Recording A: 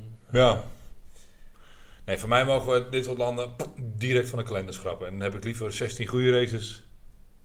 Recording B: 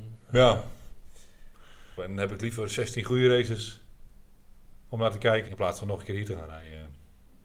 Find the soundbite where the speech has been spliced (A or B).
B